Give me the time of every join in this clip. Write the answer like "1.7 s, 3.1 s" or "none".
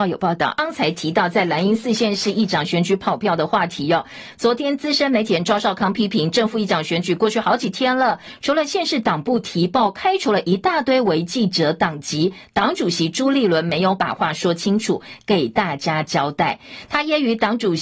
none